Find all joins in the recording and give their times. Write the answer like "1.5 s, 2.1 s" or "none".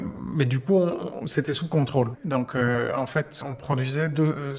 2.1 s, 3.4 s